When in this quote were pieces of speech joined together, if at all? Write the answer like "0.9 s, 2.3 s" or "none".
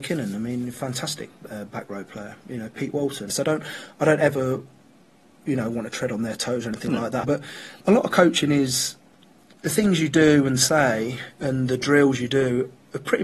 3.3 s, 7.2 s